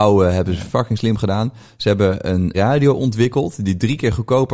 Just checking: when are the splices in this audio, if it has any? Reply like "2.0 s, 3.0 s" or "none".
2.5 s